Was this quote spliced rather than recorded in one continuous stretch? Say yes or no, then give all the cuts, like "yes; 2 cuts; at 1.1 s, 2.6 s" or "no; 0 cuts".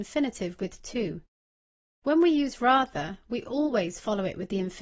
no; 0 cuts